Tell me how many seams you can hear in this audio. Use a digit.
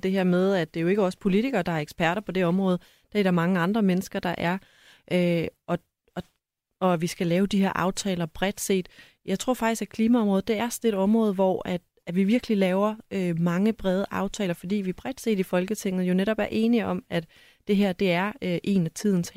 0